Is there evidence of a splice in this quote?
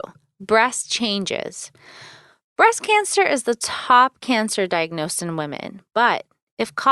no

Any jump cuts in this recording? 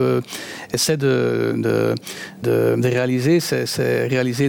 yes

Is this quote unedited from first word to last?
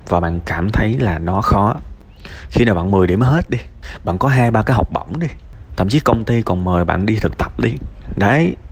yes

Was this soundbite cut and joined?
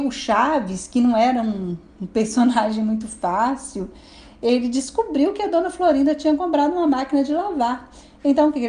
no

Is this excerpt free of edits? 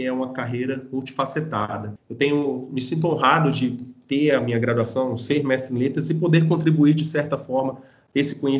yes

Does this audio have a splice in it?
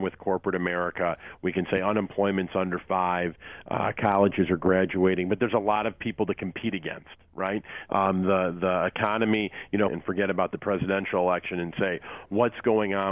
yes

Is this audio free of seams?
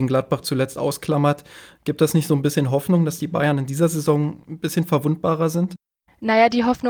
yes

